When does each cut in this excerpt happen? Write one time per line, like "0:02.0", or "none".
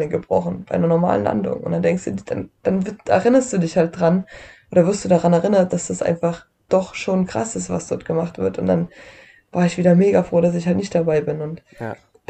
none